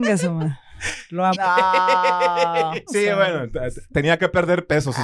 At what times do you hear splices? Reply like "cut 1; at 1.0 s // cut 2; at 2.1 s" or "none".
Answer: cut 1; at 1.3 s // cut 2; at 2.9 s